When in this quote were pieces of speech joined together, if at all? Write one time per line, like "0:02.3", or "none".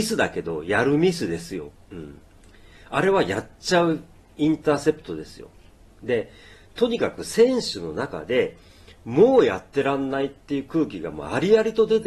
0:01.7
0:05.9